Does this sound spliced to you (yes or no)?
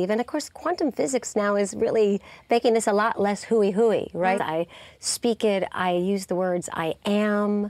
yes